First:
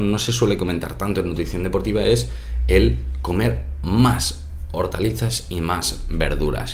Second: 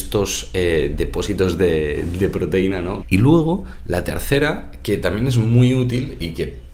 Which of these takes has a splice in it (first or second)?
second